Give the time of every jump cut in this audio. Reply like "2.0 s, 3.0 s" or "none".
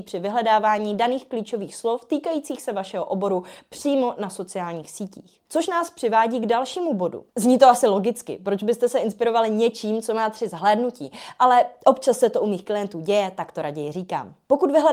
7.3 s

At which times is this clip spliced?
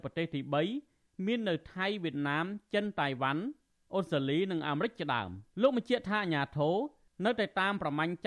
5.5 s

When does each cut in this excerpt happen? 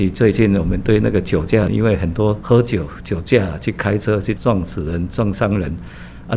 1.7 s, 4.4 s

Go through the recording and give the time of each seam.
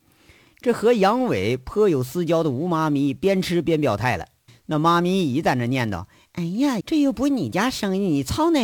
4.5 s, 6.8 s

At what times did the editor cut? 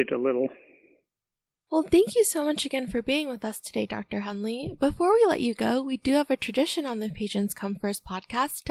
none

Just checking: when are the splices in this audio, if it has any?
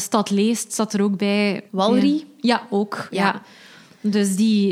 1.7 s

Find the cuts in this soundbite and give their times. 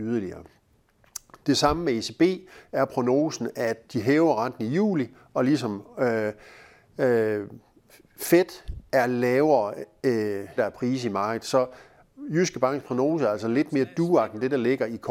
10.6 s

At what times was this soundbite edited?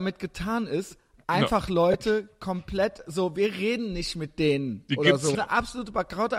5.3 s

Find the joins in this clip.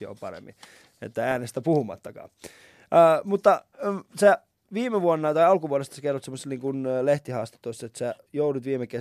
none

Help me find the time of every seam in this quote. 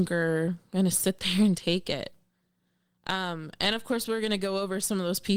none

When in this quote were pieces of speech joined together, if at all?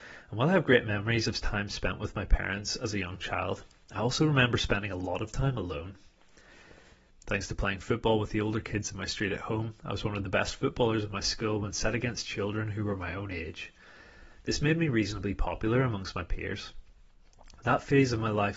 7.1 s

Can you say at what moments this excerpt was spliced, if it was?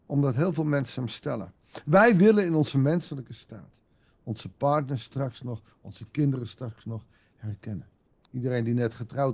8.2 s

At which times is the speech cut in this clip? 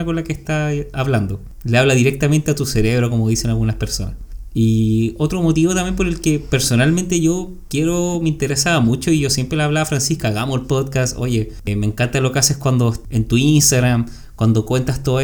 none

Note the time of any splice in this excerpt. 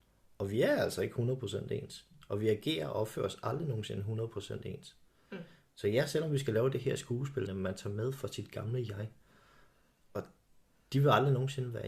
7.5 s

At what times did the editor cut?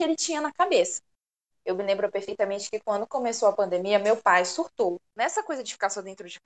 1.5 s, 5.1 s

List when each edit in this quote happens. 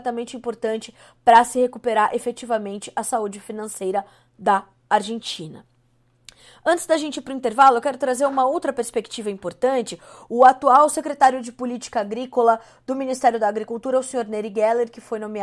none

